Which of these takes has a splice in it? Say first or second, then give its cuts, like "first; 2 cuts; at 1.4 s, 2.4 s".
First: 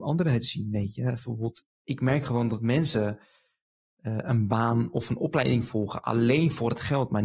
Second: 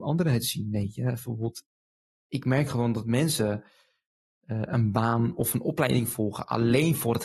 first; 1 cut; at 1.7 s